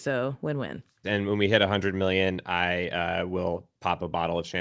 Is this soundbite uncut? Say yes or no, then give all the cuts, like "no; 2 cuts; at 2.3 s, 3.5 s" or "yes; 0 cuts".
no; 1 cut; at 1.0 s